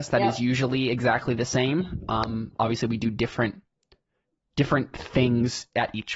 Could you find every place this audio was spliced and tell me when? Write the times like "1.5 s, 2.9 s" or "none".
none

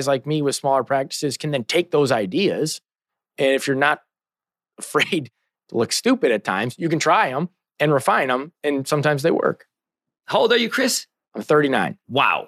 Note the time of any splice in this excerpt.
none

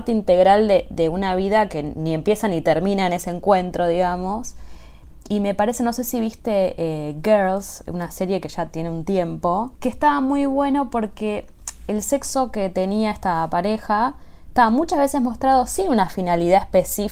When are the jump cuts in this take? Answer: 9.7 s

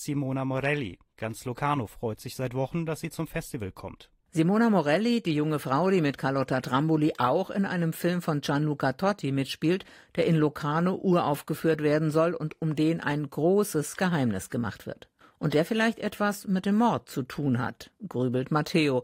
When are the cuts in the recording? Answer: none

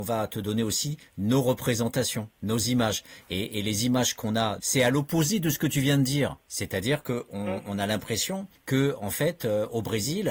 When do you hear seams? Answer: 4.6 s, 6.4 s

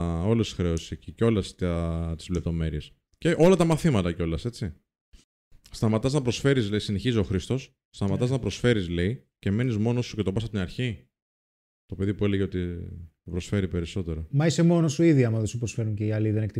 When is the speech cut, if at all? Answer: none

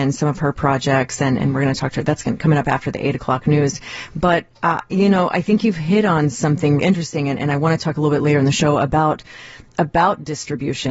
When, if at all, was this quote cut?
6.8 s

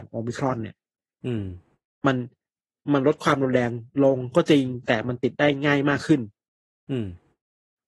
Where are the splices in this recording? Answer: none

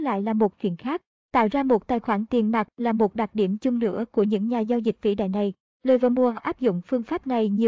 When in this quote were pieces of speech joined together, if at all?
5.7 s

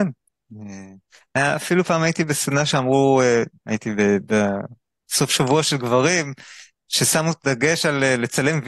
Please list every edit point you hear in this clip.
3.6 s

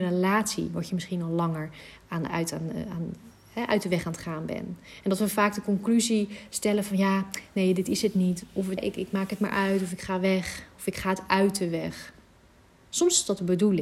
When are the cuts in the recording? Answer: 8.8 s

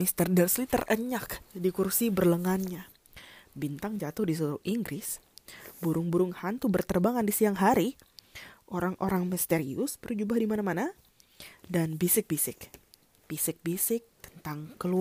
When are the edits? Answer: none

